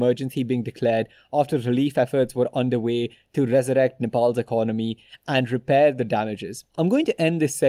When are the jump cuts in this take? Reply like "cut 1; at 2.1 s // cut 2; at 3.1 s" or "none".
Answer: cut 1; at 6.7 s